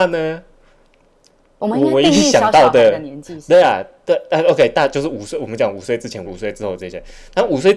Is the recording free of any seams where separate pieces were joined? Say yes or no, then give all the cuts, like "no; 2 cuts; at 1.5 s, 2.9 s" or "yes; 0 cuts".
no; 1 cut; at 6.3 s